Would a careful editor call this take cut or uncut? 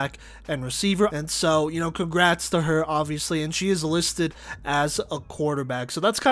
cut